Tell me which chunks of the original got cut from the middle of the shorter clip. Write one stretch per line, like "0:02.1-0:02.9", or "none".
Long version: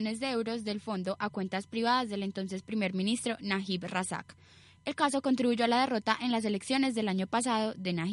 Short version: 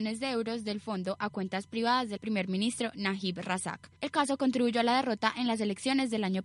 0:02.2-0:02.6
0:04.4-0:04.8